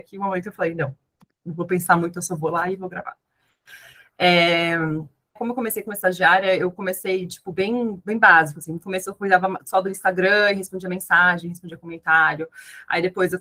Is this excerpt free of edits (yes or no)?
no